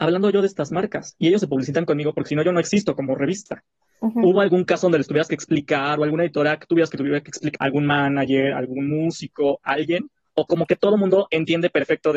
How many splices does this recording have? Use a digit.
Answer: 1